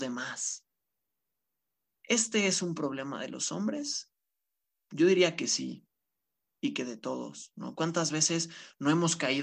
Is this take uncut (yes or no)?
yes